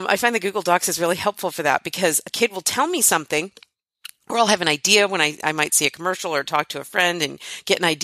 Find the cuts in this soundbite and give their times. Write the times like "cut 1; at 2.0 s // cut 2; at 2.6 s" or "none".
none

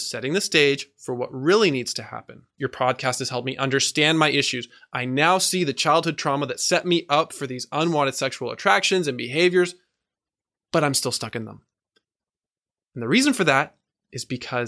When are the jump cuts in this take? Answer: cut 1; at 2.6 s

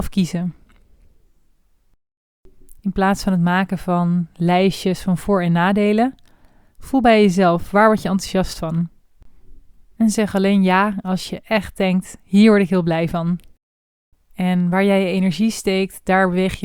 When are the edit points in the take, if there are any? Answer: cut 1; at 2.8 s // cut 2; at 14.1 s

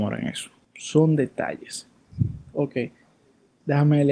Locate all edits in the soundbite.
none

